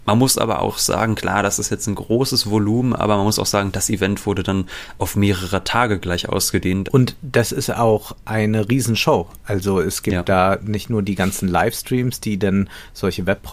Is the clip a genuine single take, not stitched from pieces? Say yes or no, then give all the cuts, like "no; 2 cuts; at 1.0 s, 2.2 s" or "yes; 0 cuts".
no; 1 cut; at 6.9 s